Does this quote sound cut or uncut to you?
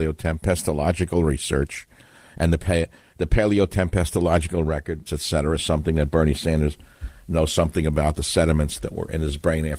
cut